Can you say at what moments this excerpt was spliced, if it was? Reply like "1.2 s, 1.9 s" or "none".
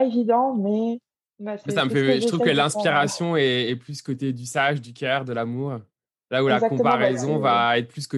1.3 s